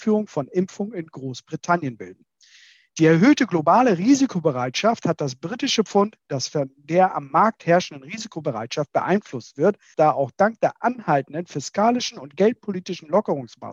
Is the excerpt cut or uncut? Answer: cut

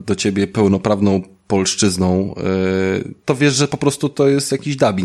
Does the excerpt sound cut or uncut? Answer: cut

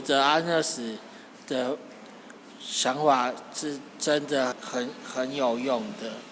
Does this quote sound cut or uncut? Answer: cut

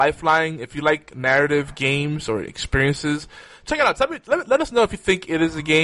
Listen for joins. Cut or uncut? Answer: uncut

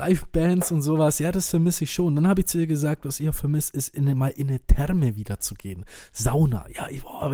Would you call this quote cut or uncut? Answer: uncut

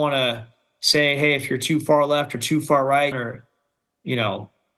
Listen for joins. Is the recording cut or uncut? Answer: cut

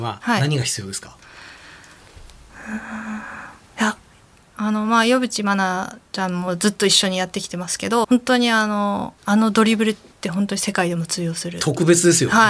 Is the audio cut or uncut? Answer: cut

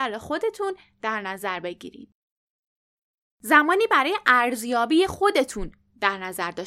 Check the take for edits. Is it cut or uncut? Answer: uncut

